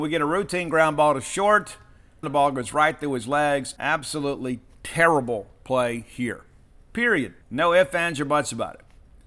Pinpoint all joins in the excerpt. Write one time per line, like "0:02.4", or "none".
0:02.2
0:03.8
0:07.4